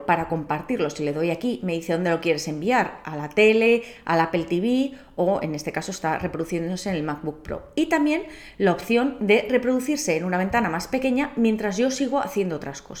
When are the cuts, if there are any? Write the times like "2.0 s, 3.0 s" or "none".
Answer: none